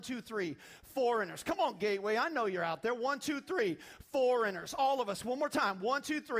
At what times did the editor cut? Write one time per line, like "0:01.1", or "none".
none